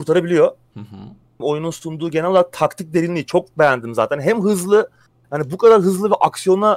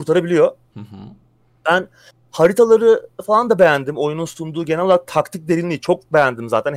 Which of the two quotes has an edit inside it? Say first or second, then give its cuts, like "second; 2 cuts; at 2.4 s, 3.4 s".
first; 1 cut; at 1.4 s